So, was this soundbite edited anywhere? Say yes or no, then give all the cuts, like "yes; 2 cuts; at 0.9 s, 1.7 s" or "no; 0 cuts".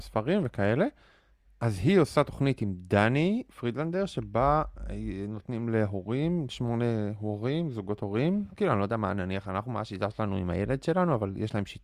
yes; 2 cuts; at 6.5 s, 8.6 s